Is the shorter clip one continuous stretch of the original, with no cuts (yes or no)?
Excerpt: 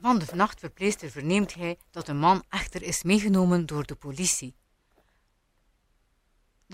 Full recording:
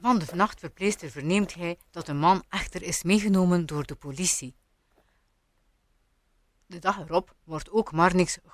yes